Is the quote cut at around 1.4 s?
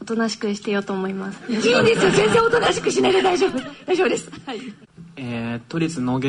no; 0 cuts

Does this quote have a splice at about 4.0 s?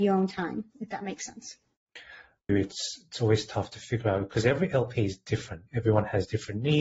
no; 2 cuts; at 2.5 s, 5.7 s

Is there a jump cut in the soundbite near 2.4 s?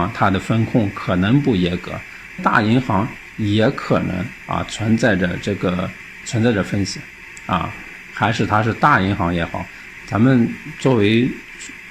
yes; 2 cuts; at 2.4 s, 8.1 s

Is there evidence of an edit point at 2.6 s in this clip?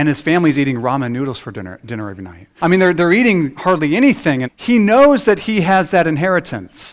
yes; 2 cuts; at 2.6 s, 4.4 s

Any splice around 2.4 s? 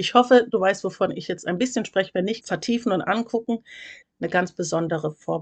yes; 2 cuts; at 2.4 s, 4.0 s

